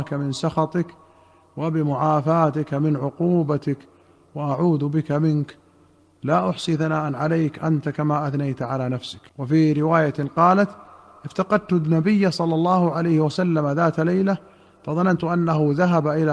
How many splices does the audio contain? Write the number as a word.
one